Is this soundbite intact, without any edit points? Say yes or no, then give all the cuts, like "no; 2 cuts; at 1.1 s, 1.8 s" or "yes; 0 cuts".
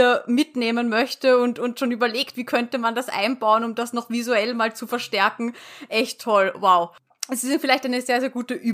yes; 0 cuts